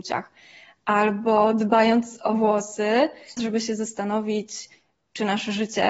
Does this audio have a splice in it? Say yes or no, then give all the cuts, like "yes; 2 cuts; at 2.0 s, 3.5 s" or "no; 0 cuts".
yes; 1 cut; at 3.4 s